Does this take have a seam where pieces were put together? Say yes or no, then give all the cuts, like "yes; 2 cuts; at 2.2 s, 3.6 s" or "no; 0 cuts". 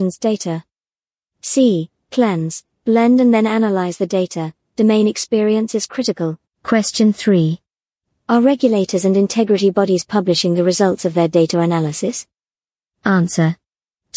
yes; 1 cut; at 6.4 s